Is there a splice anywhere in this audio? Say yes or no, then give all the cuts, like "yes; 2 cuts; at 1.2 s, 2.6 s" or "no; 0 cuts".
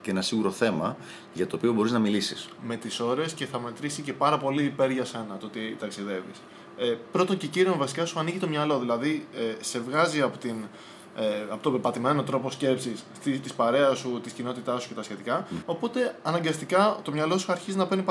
yes; 2 cuts; at 13.4 s, 15.6 s